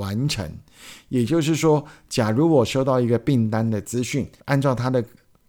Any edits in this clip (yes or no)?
yes